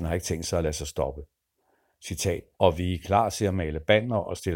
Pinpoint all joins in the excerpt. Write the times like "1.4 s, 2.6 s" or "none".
2.6 s